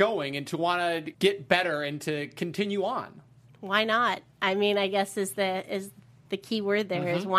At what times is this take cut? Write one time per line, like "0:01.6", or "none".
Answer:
0:01.1